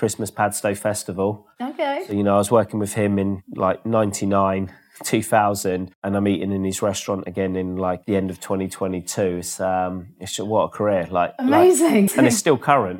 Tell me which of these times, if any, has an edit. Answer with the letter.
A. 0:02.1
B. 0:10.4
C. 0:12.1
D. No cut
C